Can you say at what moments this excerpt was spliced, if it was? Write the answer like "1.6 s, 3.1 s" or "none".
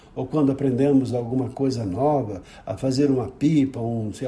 none